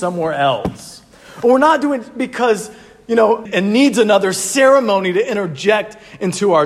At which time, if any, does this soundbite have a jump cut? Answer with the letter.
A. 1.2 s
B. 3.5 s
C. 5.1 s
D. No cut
B